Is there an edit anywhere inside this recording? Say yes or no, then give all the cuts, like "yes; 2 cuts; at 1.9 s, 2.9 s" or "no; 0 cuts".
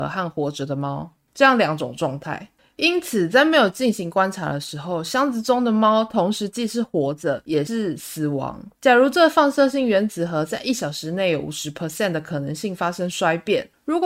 yes; 1 cut; at 8.7 s